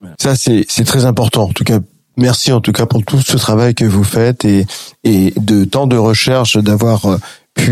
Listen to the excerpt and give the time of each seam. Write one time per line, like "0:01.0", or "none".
none